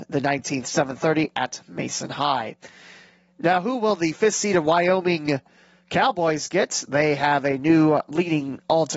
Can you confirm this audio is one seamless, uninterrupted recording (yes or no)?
yes